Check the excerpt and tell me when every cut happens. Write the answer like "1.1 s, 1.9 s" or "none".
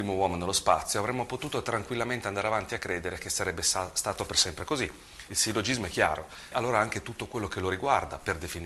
5.3 s, 6.5 s

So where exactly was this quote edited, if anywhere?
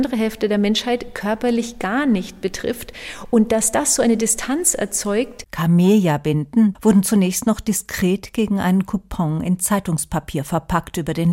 5.5 s, 6.7 s

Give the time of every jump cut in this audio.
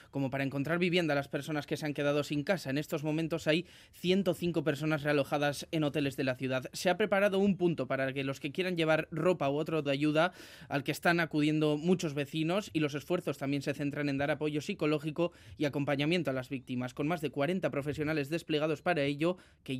9.9 s

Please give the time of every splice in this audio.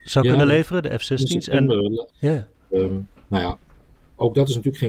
2.1 s

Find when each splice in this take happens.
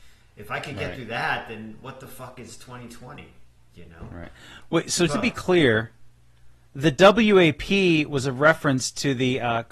5.1 s

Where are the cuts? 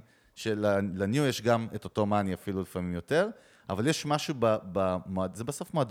none

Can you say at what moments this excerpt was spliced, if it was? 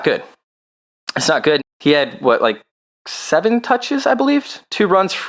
1.6 s

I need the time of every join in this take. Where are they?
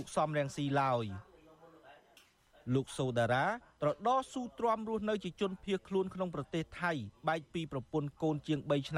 none

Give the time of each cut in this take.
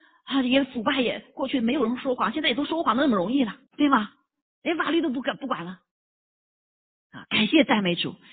3.7 s

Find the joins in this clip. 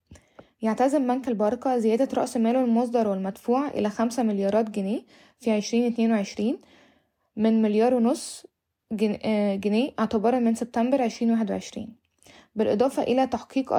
none

